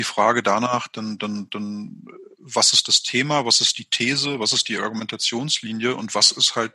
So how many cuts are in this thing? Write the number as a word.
zero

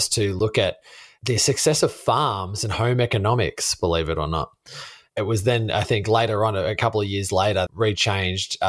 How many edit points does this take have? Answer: one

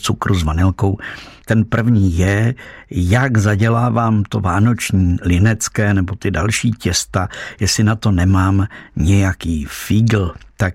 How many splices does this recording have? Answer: one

